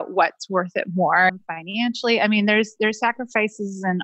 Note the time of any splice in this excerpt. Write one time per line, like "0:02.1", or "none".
0:01.3